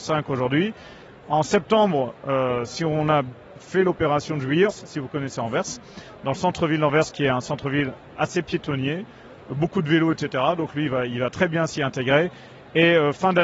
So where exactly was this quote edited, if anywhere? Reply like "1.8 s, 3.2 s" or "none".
4.7 s

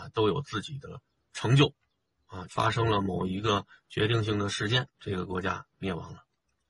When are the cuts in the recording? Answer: 2.4 s, 4.9 s

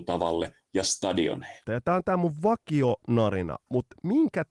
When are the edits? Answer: 1.6 s

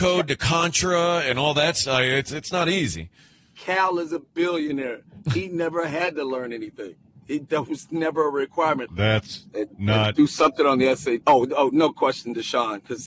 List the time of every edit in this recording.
8.9 s, 11.2 s

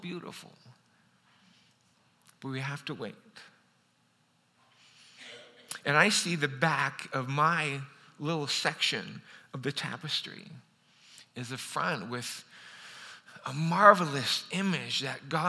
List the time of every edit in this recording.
11.3 s

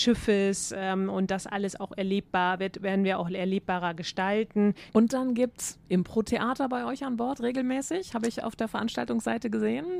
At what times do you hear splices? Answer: 4.9 s

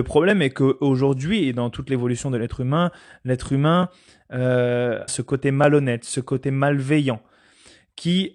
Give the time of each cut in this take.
5.1 s

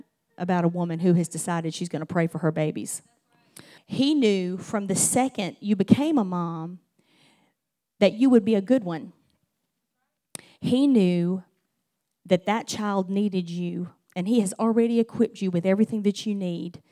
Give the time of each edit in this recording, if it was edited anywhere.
3.8 s

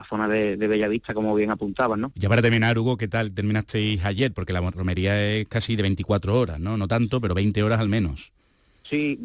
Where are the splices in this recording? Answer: 2.1 s

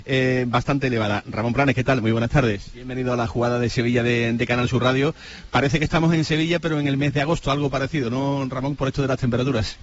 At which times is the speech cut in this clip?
2.7 s

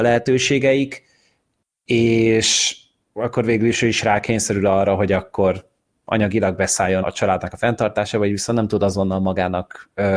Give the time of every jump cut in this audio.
7.0 s

